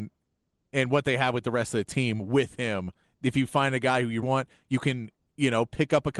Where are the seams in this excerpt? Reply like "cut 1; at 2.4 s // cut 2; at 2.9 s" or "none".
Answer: cut 1; at 3.0 s // cut 2; at 4.2 s